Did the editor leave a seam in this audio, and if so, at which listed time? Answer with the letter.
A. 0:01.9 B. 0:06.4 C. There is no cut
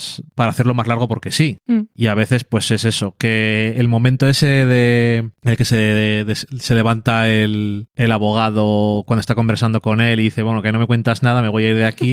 C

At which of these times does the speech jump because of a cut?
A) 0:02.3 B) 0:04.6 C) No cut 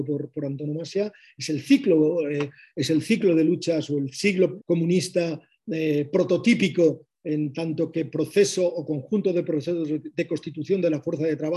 B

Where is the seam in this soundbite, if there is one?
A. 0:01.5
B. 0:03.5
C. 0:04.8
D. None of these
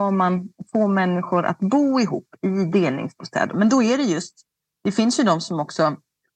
B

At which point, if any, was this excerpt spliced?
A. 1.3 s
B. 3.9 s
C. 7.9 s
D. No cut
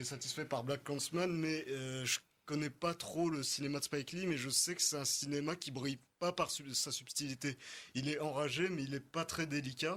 D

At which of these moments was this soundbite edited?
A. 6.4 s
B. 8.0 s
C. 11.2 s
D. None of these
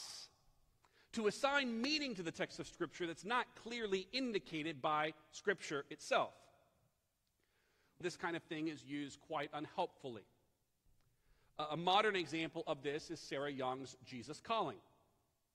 B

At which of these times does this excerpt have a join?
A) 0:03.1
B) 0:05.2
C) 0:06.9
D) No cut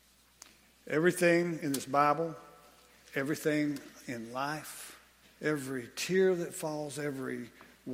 B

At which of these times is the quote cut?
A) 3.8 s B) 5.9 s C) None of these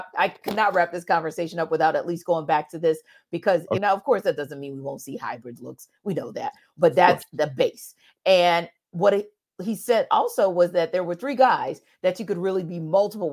A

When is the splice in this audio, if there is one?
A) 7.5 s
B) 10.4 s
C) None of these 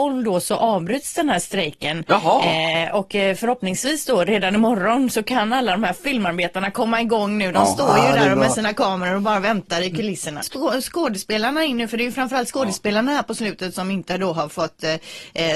B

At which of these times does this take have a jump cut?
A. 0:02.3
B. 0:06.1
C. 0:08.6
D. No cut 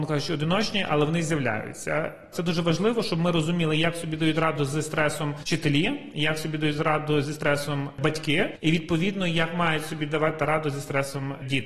A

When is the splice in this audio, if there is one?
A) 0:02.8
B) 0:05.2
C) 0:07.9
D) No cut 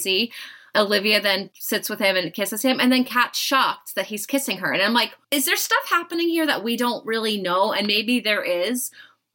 B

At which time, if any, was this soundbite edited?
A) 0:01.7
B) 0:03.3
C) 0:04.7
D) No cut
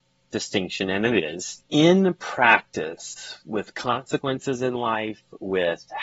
A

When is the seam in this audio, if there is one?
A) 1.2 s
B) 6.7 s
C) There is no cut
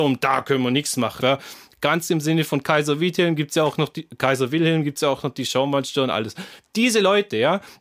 A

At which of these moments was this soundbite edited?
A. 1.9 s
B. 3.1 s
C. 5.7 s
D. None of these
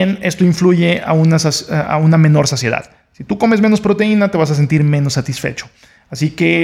D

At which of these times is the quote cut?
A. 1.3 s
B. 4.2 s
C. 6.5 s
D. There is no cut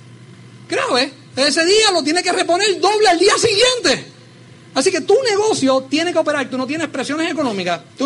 C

